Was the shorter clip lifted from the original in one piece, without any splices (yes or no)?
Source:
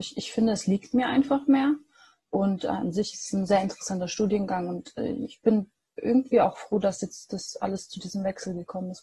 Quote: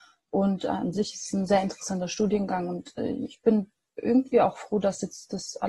yes